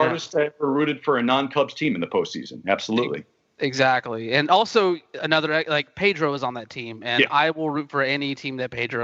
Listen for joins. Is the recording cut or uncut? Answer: uncut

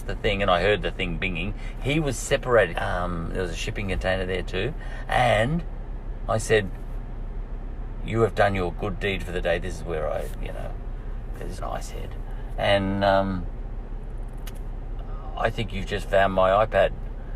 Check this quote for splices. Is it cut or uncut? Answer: cut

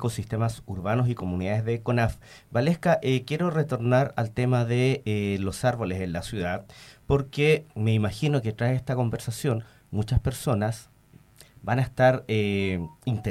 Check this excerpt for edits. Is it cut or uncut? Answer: uncut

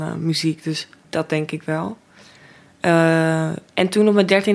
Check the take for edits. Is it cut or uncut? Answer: cut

